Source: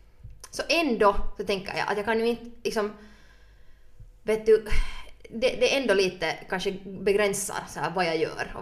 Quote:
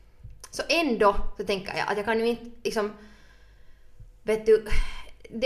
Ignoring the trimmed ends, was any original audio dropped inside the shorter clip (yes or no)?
no